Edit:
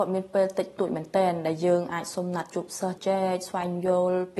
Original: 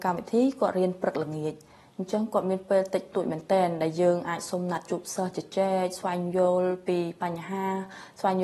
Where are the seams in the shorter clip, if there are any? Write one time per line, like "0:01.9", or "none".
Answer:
0:03.0